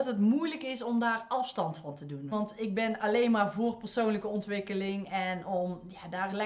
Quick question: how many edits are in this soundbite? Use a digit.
1